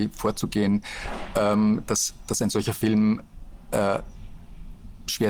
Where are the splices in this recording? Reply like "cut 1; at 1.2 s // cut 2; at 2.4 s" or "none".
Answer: none